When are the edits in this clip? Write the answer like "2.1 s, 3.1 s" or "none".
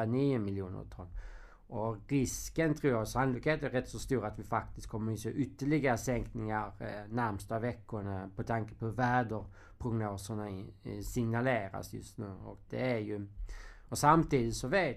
12.7 s, 13.9 s